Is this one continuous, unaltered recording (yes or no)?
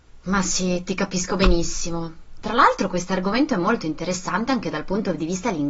yes